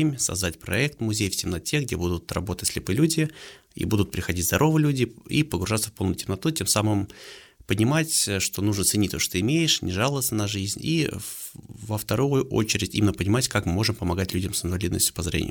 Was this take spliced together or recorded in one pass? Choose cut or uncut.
uncut